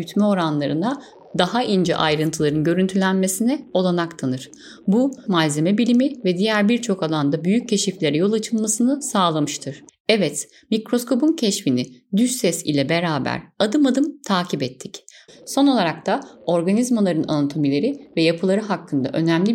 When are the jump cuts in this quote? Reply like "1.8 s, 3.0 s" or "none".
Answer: 5.3 s, 9.9 s, 15.3 s